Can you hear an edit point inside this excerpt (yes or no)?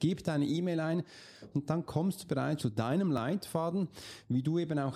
yes